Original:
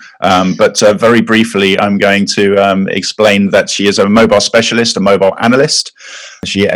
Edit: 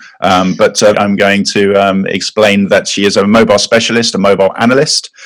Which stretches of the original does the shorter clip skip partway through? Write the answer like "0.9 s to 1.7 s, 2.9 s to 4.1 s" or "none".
0.9 s to 1.8 s